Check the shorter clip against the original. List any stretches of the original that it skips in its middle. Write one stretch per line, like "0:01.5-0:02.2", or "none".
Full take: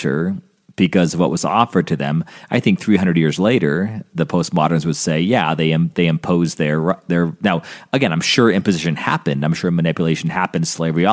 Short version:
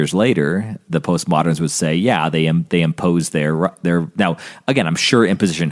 none